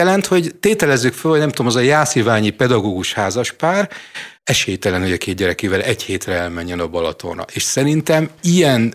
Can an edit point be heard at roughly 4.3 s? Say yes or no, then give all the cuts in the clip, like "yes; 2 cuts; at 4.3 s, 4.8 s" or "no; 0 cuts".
yes; 1 cut; at 4.3 s